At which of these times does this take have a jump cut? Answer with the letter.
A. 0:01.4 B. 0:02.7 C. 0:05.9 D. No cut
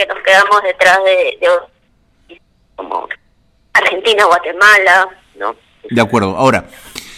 C